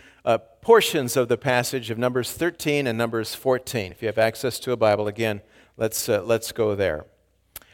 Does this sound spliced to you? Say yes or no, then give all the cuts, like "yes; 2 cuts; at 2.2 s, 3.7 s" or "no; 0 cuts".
no; 0 cuts